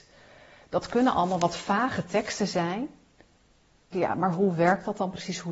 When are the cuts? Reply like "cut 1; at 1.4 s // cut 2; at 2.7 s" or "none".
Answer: cut 1; at 3.9 s